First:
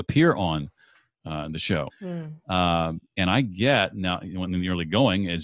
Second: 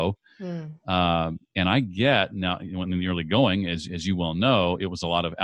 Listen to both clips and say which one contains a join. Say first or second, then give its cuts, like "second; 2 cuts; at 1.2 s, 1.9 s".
first; 1 cut; at 1.9 s